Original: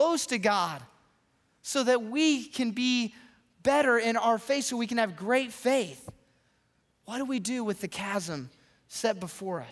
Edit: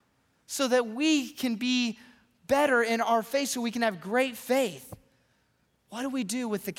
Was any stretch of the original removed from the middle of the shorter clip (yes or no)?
no